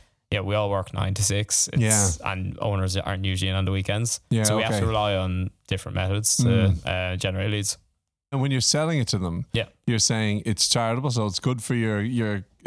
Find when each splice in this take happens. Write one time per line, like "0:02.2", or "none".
0:08.3